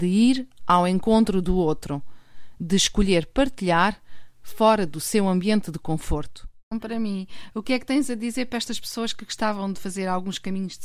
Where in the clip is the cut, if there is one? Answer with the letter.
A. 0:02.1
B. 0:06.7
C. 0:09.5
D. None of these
B